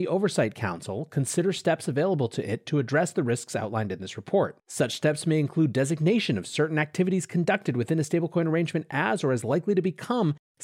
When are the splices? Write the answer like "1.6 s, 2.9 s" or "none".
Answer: 4.6 s